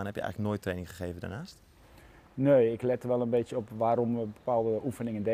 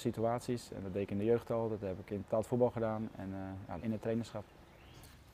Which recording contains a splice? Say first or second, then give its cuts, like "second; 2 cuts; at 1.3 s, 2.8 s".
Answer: second; 1 cut; at 3.8 s